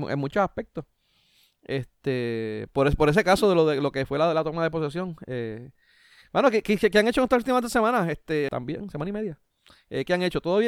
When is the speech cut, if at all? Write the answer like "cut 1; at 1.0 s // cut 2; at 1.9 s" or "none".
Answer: cut 1; at 8.5 s